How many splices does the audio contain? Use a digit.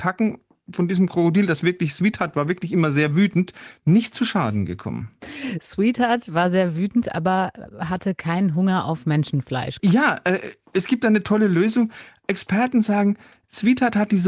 1